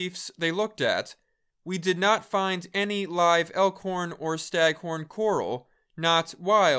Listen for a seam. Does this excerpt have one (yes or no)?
no